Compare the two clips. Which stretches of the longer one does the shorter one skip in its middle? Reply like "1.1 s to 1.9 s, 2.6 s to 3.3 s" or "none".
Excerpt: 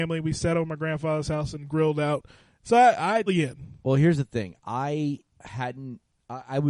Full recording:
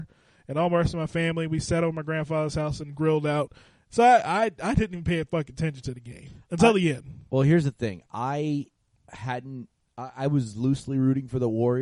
4.5 s to 6.7 s, 8.8 s to 9.0 s